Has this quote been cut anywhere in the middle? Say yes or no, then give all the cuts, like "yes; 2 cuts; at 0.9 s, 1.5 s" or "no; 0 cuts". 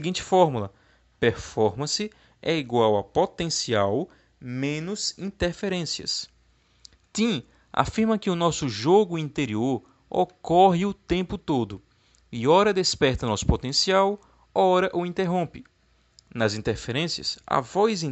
no; 0 cuts